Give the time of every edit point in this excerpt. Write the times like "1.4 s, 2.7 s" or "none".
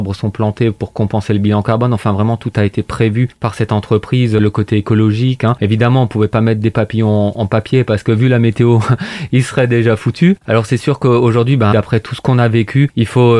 10.4 s, 11.7 s

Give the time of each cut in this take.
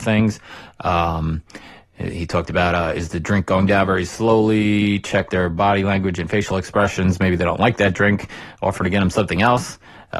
none

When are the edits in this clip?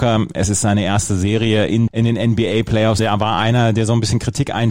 1.9 s, 3.0 s

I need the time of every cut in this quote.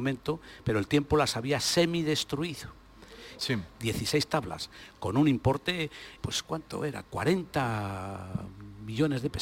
3.4 s, 6.2 s

